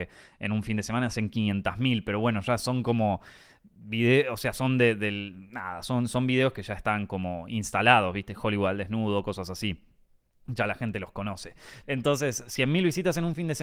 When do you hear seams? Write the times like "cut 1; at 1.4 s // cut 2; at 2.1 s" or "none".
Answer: cut 1; at 11.8 s